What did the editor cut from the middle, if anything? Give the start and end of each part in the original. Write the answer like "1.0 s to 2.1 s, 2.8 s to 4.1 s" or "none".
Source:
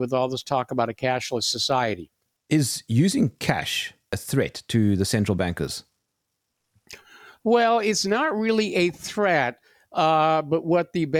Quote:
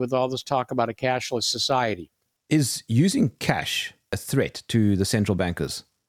none